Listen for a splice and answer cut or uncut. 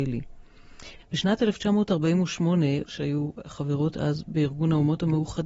cut